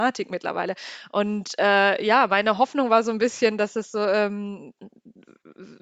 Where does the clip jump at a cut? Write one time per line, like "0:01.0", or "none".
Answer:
none

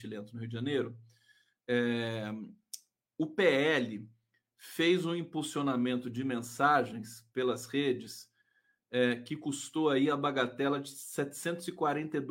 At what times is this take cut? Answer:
0:07.3

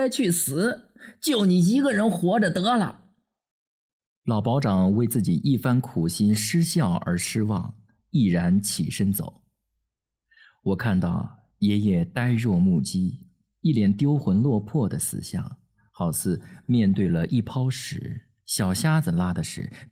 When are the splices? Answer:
none

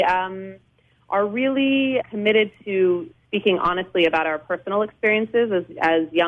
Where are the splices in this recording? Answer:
0:02.0

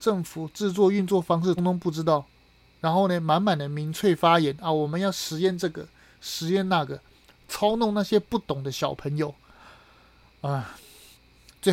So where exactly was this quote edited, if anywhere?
0:01.6

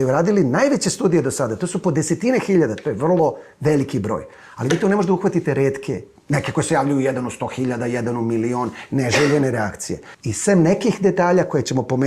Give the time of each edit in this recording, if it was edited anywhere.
0:10.1

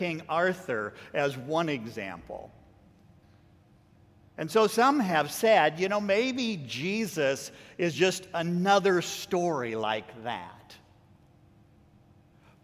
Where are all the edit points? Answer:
none

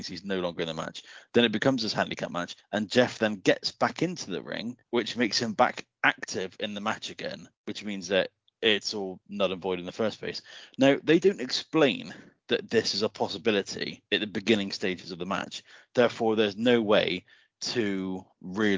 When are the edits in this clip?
none

